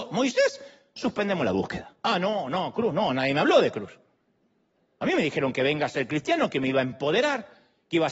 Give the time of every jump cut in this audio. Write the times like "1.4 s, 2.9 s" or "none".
1.0 s